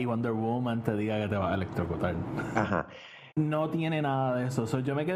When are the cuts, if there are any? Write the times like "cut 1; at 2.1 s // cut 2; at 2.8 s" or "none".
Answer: cut 1; at 3.3 s